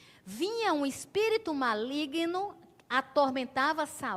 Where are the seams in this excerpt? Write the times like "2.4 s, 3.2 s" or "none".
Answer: none